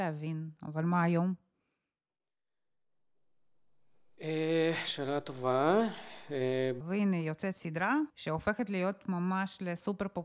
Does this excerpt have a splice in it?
yes; 2 cuts; at 6.8 s, 8.1 s

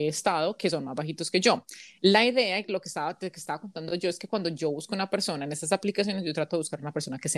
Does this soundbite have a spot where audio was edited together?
no; 0 cuts

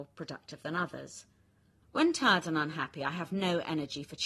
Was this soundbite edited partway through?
yes; 1 cut; at 1.8 s

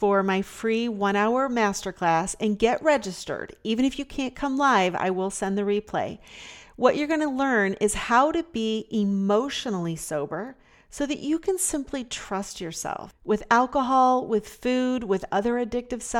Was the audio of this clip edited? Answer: no; 0 cuts

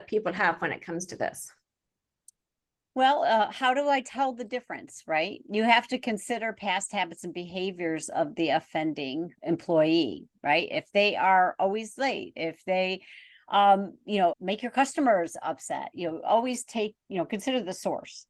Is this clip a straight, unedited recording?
no; 2 cuts; at 12.3 s, 14.3 s

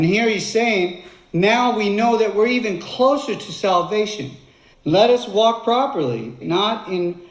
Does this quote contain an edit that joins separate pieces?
yes; 2 cuts; at 4.7 s, 6.4 s

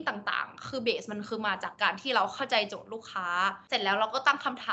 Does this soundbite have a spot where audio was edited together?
yes; 1 cut; at 1.7 s

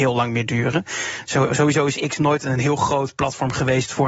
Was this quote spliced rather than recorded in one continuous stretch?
no; 0 cuts

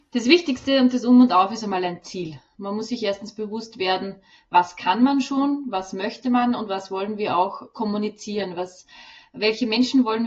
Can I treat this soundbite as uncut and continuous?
yes; 0 cuts

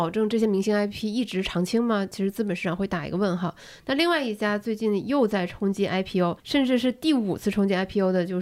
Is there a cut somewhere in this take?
yes; 1 cut; at 6.4 s

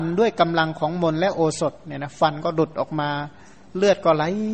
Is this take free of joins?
yes; 0 cuts

